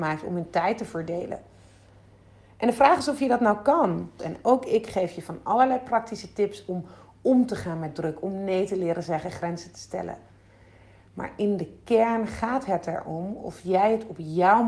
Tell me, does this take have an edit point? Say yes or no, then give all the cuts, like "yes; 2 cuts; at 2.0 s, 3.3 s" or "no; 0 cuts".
yes; 1 cut; at 4.2 s